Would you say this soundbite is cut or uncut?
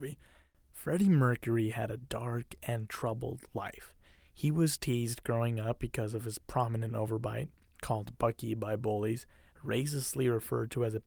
uncut